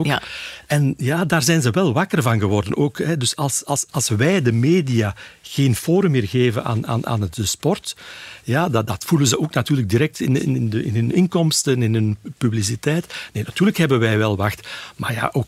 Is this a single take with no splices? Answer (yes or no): yes